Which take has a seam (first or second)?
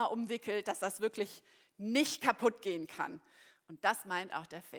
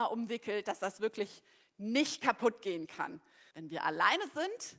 second